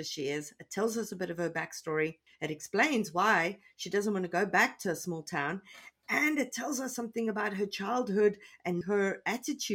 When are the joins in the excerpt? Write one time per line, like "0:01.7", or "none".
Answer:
0:08.8